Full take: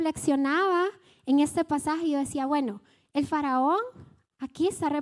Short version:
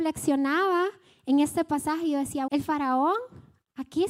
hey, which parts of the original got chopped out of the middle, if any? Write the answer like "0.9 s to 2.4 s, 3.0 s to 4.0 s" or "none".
2.5 s to 3.1 s